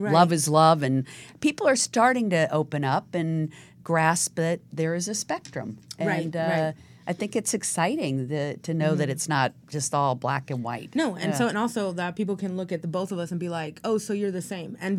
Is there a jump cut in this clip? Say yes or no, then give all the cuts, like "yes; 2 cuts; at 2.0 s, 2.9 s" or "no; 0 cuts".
no; 0 cuts